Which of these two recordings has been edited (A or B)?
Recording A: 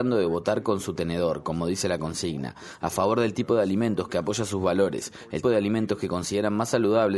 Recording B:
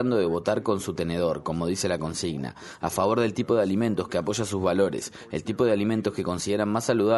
A